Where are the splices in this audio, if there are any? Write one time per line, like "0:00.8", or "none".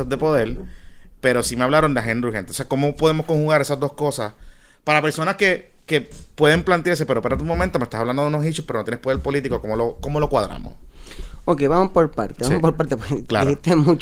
none